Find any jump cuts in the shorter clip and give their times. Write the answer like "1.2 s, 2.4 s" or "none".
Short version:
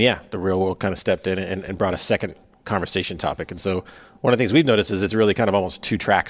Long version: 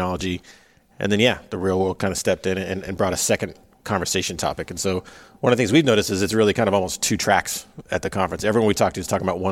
none